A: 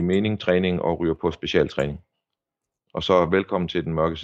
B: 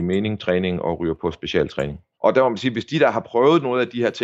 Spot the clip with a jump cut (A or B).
B